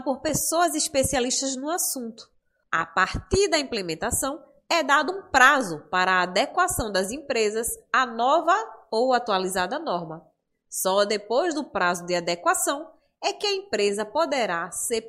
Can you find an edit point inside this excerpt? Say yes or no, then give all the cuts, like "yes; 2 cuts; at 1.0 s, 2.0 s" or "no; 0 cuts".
yes; 1 cut; at 2.6 s